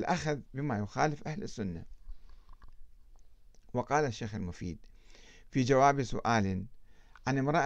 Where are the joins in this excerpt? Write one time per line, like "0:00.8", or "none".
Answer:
none